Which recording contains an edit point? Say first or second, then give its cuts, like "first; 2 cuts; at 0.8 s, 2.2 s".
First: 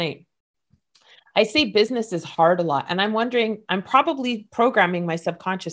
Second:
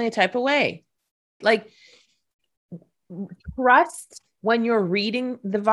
second; 1 cut; at 1.4 s